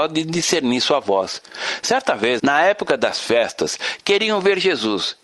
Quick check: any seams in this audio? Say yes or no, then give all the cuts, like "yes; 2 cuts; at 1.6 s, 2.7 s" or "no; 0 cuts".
yes; 1 cut; at 2.4 s